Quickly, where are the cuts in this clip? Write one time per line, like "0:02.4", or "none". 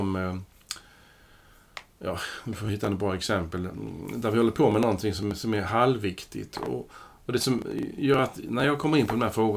none